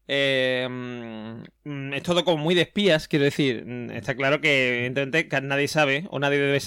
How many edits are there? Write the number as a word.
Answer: one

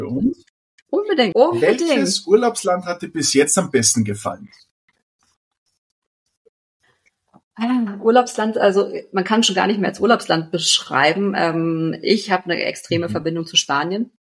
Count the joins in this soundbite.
one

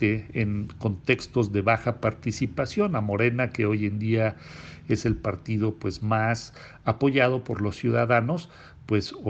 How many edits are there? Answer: zero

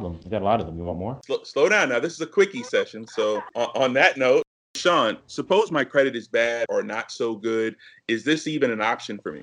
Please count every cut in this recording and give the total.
one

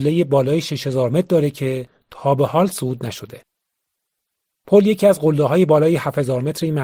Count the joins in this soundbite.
zero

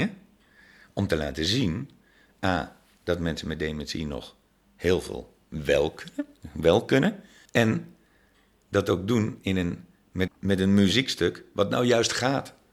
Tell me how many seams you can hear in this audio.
two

